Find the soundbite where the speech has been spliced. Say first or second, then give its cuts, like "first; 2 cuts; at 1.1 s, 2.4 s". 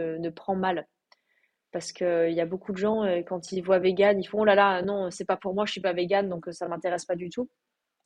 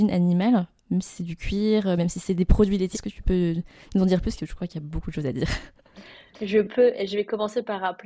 second; 1 cut; at 2.9 s